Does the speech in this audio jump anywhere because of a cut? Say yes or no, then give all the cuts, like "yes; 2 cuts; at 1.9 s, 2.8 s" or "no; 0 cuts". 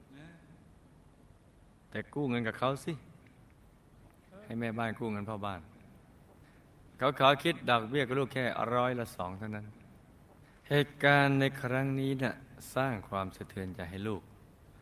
no; 0 cuts